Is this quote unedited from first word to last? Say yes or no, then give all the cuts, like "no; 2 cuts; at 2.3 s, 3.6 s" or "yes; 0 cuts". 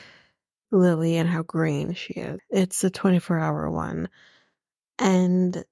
no; 1 cut; at 2.4 s